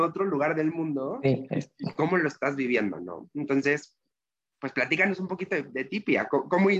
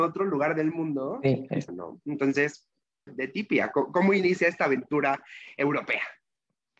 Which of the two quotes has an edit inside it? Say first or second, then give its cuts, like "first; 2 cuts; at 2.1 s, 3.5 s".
second; 2 cuts; at 1.7 s, 3.1 s